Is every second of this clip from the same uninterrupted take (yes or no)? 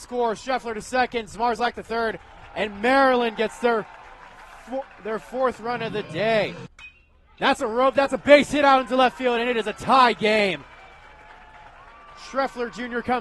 yes